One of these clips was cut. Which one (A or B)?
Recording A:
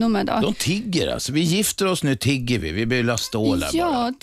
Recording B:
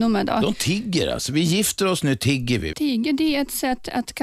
B